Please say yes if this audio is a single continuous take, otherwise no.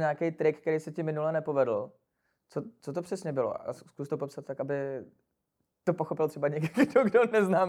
yes